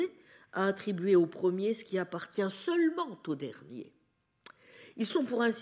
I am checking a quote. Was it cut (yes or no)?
no